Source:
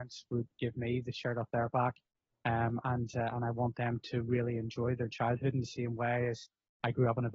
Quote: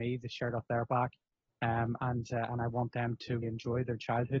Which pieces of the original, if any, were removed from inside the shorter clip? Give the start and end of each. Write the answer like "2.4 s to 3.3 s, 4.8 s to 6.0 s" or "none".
4.3 s to 4.5 s